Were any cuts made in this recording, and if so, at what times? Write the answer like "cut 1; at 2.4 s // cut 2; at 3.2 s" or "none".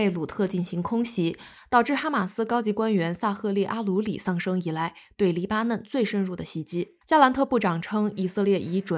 cut 1; at 7.0 s

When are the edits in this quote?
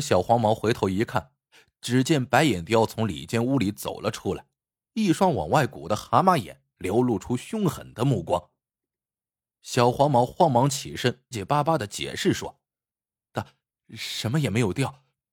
cut 1; at 11.3 s // cut 2; at 13.8 s

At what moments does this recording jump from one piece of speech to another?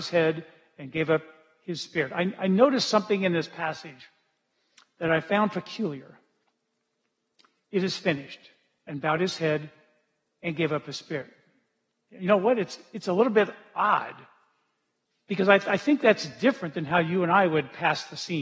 none

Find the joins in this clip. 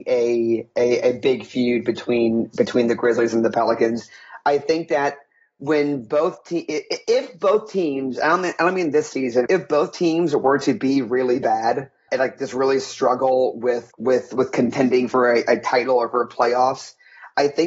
cut 1; at 9.5 s // cut 2; at 12.1 s // cut 3; at 13.9 s

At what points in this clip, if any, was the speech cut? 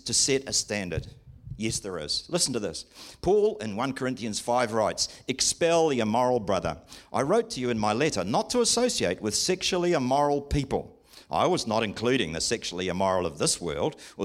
none

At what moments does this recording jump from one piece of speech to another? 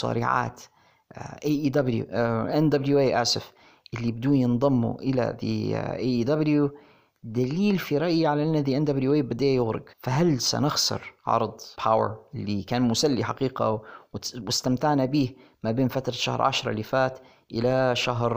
cut 1; at 9.9 s // cut 2; at 11.7 s

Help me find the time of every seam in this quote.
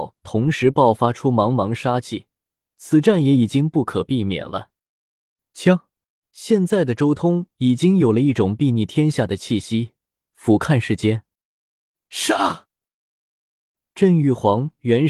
cut 1; at 2.7 s // cut 2; at 6.2 s // cut 3; at 10.2 s

